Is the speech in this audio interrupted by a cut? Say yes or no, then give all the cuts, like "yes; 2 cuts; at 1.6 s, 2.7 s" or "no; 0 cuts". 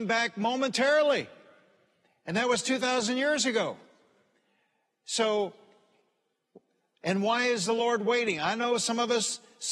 no; 0 cuts